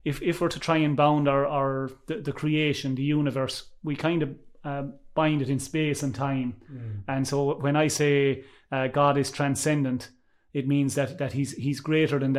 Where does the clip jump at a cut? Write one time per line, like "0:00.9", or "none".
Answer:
none